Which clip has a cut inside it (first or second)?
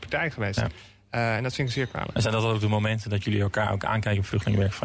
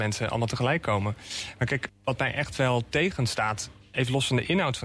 second